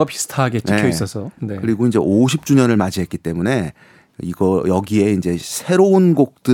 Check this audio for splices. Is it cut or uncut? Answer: uncut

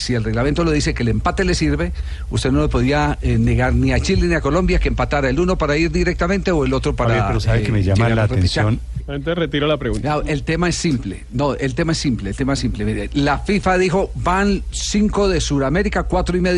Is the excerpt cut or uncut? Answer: cut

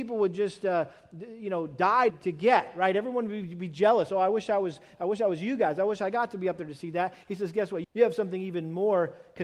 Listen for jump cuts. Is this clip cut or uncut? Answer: cut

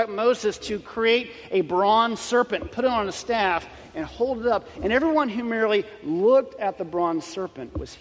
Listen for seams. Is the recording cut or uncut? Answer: uncut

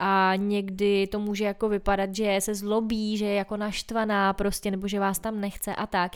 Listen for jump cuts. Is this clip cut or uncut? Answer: uncut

